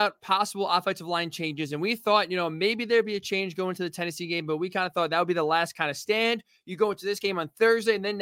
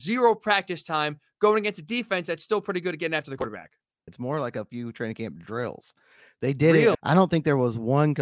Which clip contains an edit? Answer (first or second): second